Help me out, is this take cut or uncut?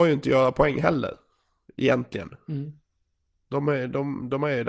uncut